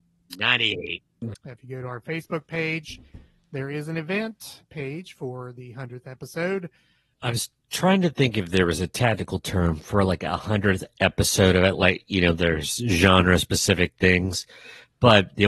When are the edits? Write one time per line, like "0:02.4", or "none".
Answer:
0:01.3
0:07.1

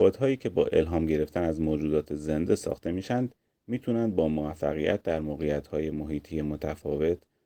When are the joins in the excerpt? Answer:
none

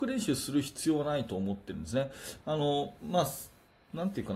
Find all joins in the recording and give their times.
0:02.4

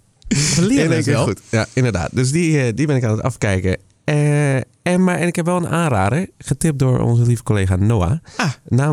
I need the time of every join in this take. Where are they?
none

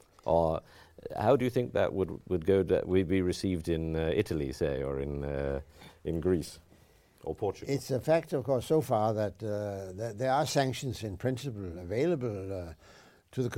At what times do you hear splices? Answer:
none

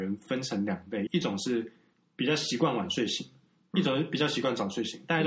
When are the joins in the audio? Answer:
0:01.1

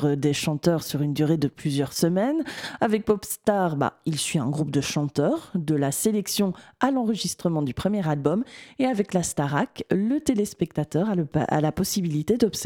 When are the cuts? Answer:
none

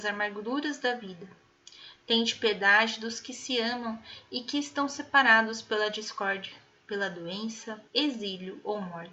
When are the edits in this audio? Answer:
0:07.9

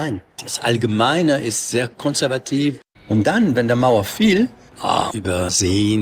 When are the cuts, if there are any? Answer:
0:02.9
0:05.1

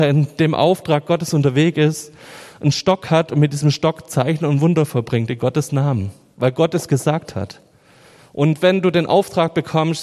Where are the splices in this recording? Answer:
0:08.2

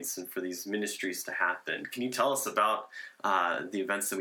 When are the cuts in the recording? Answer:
none

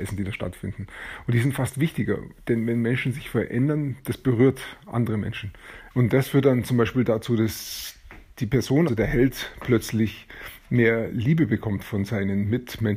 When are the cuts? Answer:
0:05.9
0:08.9

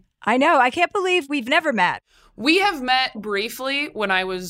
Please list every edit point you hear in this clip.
0:03.1

